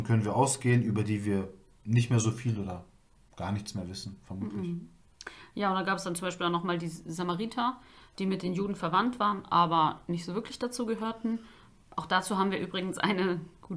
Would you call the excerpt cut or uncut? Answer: uncut